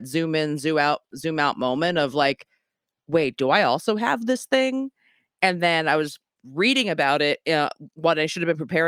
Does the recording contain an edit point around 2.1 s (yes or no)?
no